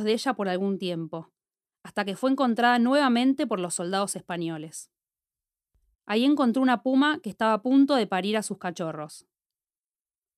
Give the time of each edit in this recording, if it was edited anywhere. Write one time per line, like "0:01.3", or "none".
0:05.9